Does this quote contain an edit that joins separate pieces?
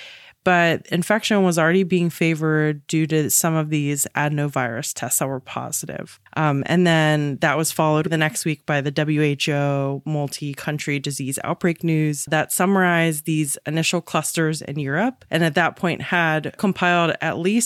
yes; 2 cuts; at 6.3 s, 12.3 s

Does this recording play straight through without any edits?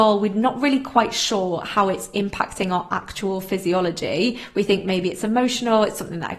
yes; 0 cuts

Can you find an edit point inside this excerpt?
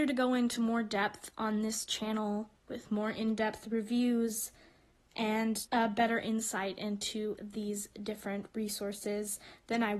yes; 1 cut; at 5.7 s

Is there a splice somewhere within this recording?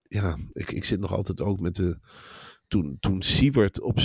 no; 0 cuts

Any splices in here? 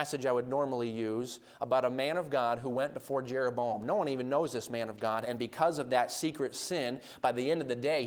yes; 1 cut; at 5.2 s

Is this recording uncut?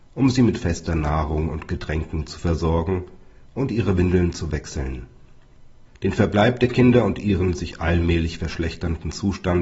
no; 1 cut; at 5.9 s

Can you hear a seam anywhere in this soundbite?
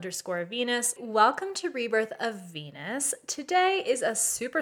yes; 1 cut; at 1.0 s

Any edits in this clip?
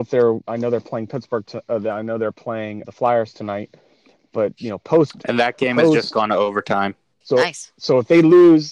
yes; 2 cuts; at 2.8 s, 7.2 s

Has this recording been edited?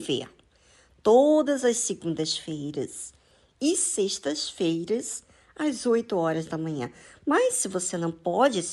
no; 0 cuts

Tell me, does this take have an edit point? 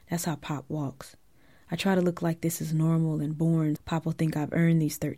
yes; 1 cut; at 3.8 s

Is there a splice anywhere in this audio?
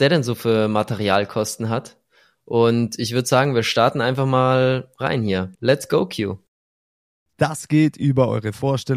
no; 0 cuts

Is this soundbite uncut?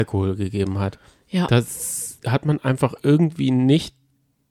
yes; 0 cuts

